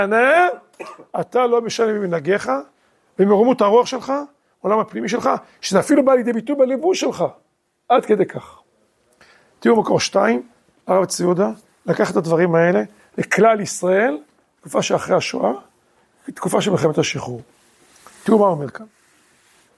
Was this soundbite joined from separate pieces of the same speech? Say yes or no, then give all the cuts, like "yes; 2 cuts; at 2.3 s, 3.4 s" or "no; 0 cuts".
no; 0 cuts